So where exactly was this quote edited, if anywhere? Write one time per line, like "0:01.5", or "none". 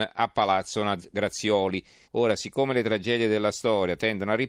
0:02.0